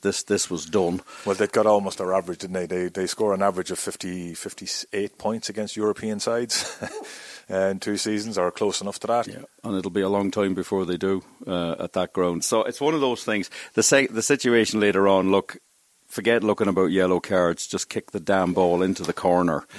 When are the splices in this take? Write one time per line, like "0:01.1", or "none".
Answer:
0:09.2
0:12.4